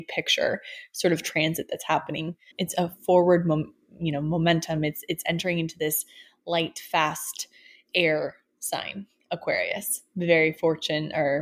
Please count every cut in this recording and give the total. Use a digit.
1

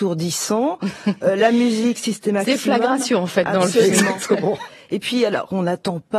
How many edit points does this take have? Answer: 1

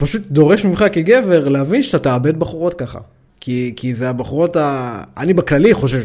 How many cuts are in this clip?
1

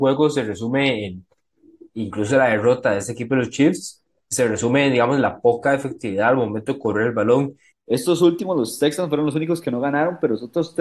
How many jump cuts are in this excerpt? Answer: 1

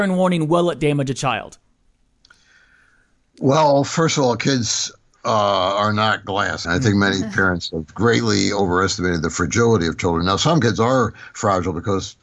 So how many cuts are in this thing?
1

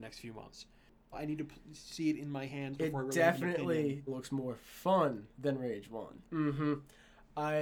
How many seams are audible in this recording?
3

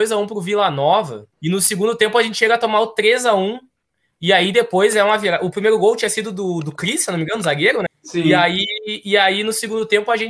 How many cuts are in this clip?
2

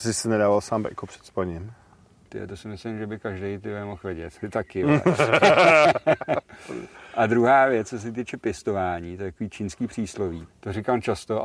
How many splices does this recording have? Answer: 2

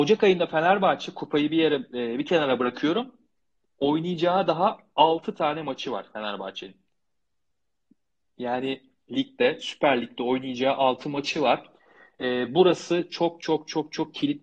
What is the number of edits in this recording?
0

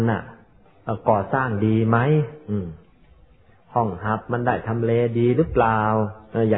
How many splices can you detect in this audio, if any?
0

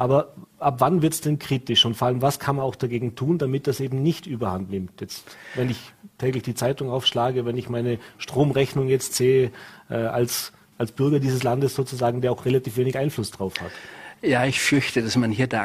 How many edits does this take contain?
1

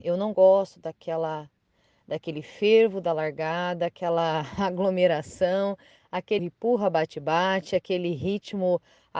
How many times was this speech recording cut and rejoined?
1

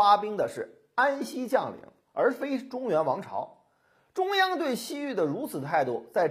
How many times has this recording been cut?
0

